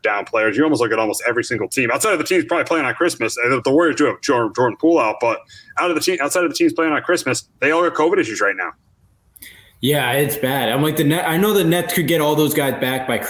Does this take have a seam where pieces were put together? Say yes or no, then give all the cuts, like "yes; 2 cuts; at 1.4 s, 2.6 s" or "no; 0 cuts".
no; 0 cuts